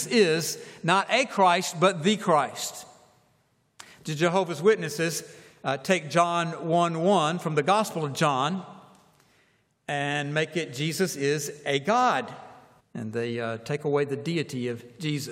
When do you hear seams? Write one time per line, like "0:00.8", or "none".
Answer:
0:12.8